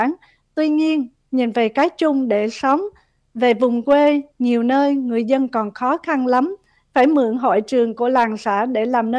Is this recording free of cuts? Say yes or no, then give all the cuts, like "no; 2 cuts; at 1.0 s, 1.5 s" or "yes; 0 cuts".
no; 1 cut; at 1.2 s